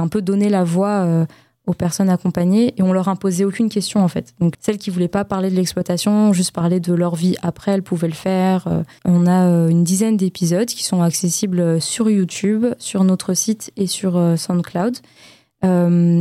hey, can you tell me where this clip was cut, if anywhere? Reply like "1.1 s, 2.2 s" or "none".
4.5 s, 9.0 s